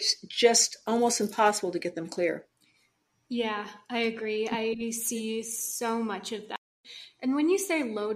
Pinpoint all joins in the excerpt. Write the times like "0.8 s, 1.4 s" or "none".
none